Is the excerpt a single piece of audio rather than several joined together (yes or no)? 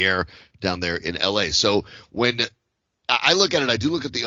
yes